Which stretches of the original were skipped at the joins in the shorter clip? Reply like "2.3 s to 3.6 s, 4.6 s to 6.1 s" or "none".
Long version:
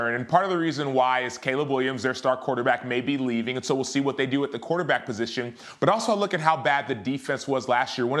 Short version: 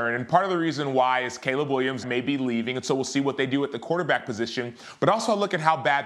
2.0 s to 2.8 s